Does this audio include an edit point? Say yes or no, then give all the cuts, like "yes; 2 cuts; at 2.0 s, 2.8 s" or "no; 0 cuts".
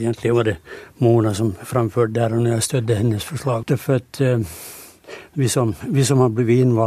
yes; 1 cut; at 3.6 s